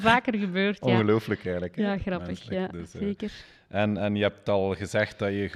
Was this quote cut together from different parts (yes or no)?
no